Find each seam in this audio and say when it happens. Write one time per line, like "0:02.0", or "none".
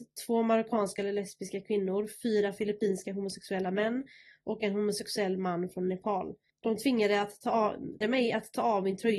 0:06.5
0:08.0